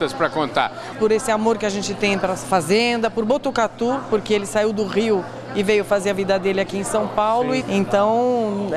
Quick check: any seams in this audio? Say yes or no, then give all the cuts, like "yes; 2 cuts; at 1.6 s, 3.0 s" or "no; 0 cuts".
yes; 2 cuts; at 0.9 s, 7.6 s